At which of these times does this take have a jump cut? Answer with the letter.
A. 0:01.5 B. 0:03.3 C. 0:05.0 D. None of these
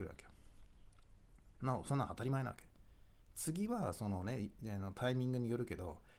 A